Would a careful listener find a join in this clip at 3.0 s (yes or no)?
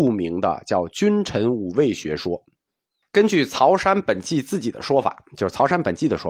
yes